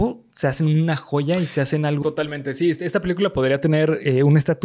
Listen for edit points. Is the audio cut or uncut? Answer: cut